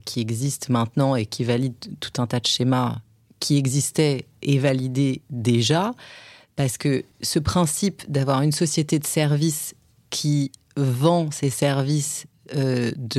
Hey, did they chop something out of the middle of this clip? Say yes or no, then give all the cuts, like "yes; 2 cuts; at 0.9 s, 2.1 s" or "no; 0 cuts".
yes; 1 cut; at 7.1 s